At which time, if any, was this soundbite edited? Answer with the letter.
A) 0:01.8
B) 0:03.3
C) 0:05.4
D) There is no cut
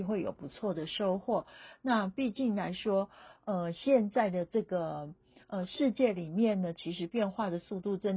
D